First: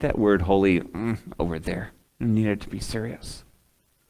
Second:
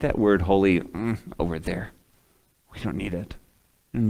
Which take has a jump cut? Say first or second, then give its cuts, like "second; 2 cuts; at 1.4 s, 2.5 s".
first; 1 cut; at 2.1 s